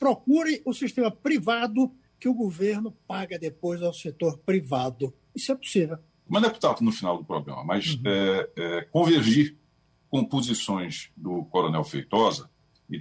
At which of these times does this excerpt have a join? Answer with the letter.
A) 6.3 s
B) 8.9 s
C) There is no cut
A